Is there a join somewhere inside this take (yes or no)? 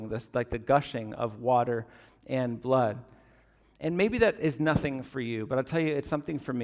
no